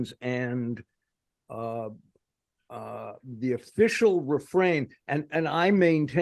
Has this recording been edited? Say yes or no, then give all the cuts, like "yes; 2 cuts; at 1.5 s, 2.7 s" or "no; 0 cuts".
no; 0 cuts